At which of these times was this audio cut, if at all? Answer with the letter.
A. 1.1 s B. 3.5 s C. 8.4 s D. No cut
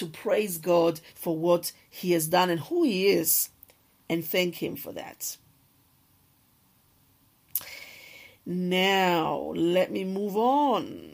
A